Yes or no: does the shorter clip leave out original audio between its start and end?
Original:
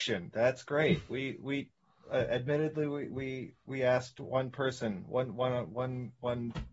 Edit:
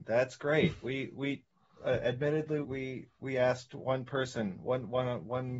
yes